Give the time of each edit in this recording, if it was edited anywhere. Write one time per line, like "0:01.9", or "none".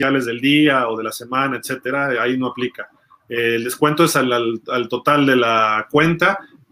none